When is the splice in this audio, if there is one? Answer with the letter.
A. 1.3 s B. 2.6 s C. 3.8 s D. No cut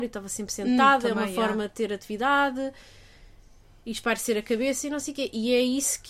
D